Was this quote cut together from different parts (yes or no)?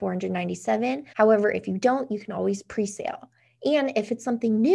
yes